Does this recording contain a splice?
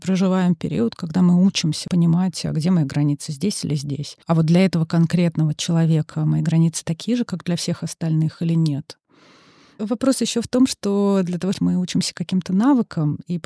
yes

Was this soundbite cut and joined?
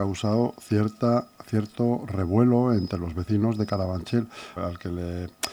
yes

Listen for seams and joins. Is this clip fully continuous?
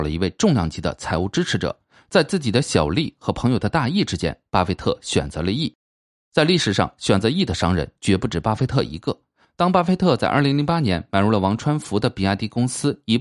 no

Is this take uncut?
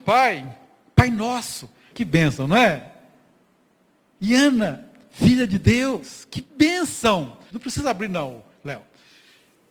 no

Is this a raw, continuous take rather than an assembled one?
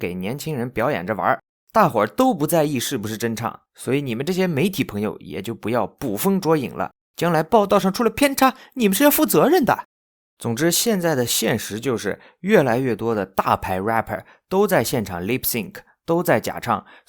yes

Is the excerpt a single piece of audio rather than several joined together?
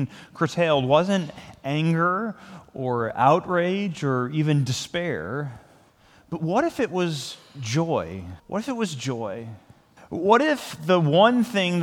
no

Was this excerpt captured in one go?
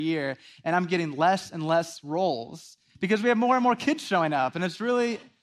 yes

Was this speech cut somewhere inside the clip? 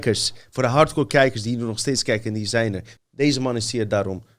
yes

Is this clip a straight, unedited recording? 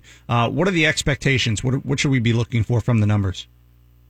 yes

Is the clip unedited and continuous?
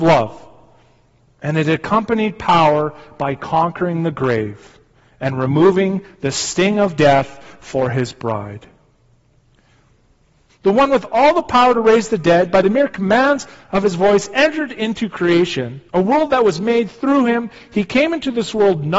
no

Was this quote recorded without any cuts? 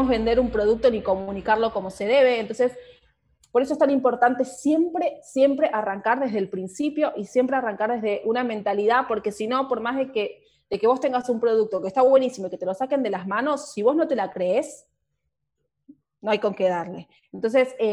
yes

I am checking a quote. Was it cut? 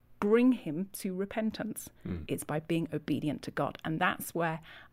yes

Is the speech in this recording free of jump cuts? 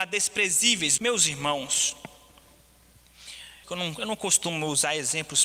no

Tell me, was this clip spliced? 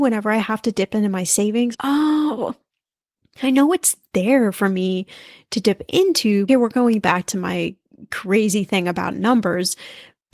yes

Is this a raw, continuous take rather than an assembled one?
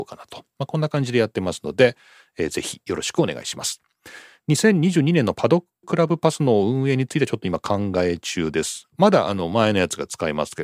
no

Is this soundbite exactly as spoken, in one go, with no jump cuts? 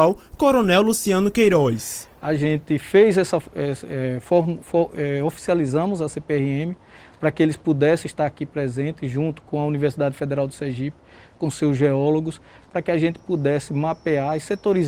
yes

